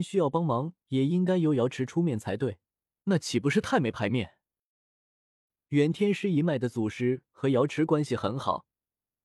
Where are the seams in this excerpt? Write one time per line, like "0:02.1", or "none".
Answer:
0:02.9
0:05.6